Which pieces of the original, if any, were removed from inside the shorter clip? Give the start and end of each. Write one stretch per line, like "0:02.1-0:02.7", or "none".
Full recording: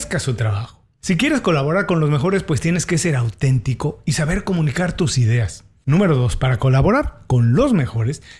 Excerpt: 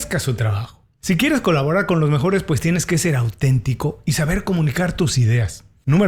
none